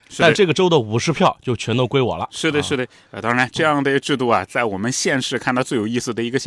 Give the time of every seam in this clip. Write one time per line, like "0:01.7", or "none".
none